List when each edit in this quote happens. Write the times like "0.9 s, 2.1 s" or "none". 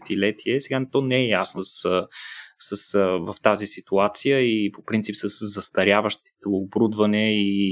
1.6 s